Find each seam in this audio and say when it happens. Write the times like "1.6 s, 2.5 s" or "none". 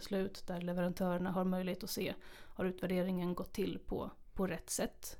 none